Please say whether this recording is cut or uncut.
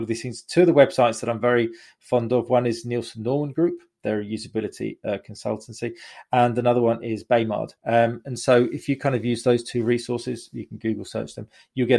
cut